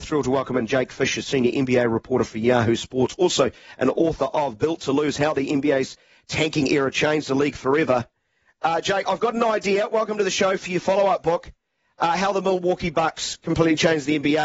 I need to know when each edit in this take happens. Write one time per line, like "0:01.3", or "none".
none